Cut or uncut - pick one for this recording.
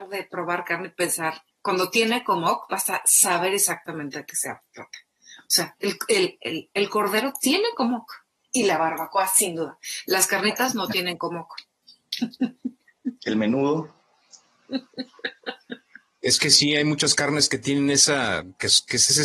uncut